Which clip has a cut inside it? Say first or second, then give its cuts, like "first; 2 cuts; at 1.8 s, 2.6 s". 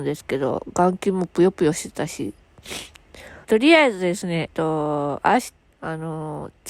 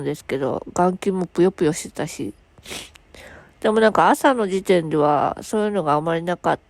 first; 3 cuts; at 3.4 s, 4.5 s, 5.7 s